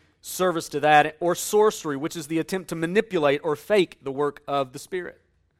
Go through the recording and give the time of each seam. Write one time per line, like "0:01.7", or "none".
none